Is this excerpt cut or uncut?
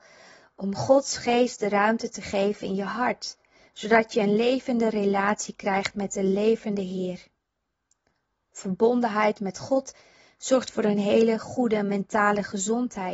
uncut